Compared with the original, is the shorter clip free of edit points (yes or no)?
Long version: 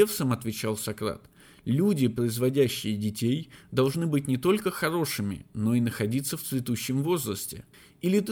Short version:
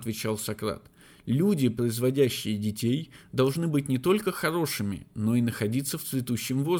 yes